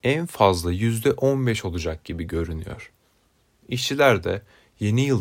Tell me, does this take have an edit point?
no; 0 cuts

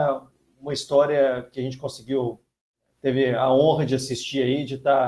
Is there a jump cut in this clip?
no; 0 cuts

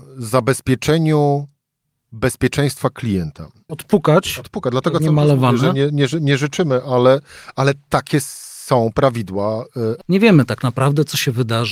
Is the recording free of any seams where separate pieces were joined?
no; 2 cuts; at 3.7 s, 10.0 s

